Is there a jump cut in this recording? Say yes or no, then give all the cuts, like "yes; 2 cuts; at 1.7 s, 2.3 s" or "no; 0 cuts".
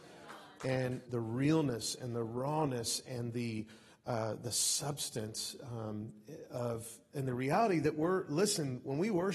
yes; 1 cut; at 1.1 s